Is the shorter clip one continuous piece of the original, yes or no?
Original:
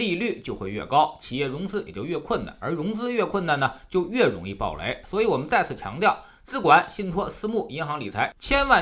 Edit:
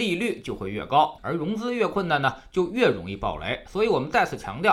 no